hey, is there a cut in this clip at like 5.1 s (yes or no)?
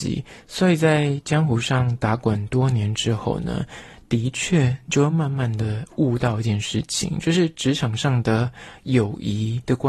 no